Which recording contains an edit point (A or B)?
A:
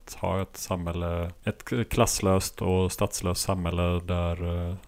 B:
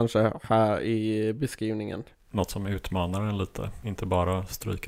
B